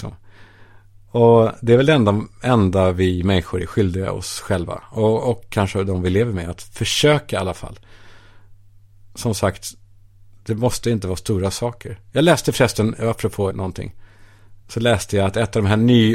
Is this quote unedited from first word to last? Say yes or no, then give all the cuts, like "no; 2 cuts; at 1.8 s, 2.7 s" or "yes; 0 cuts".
no; 2 cuts; at 13.5 s, 14.6 s